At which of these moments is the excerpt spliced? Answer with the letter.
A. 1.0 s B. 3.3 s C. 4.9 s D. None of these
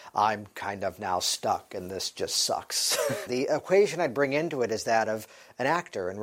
B